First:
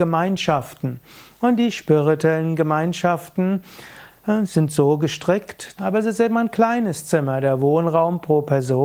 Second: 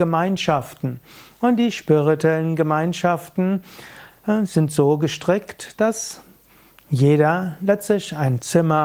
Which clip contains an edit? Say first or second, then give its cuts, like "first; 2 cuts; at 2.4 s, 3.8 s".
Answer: first; 1 cut; at 5.8 s